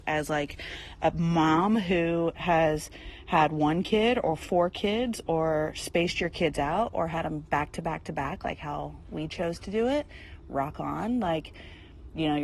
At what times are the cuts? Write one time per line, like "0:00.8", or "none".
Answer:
none